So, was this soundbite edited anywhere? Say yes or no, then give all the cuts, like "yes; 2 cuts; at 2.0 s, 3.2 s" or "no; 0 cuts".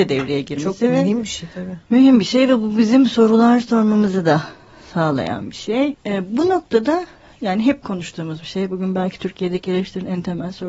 yes; 1 cut; at 5.9 s